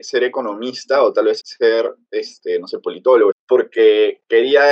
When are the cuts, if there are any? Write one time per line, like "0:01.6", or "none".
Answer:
0:01.4
0:03.3